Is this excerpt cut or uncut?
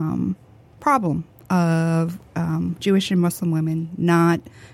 uncut